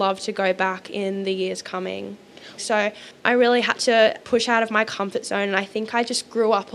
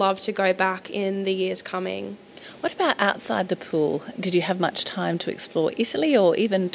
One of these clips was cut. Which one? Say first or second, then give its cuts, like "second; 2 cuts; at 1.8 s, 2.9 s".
first; 1 cut; at 2.6 s